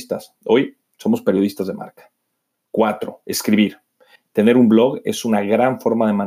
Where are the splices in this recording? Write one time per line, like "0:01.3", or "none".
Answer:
0:04.2